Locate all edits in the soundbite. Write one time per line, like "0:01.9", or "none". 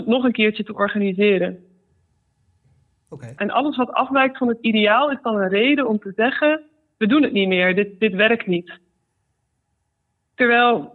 0:03.4